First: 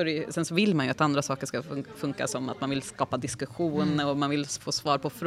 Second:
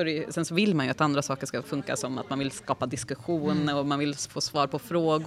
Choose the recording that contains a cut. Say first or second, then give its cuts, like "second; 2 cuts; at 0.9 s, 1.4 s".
second; 1 cut; at 1.6 s